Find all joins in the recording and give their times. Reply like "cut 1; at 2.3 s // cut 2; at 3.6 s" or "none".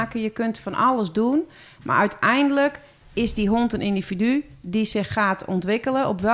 none